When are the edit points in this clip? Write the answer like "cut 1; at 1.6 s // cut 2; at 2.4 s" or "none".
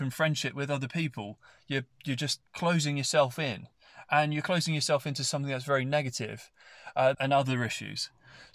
cut 1; at 2.5 s // cut 2; at 7.1 s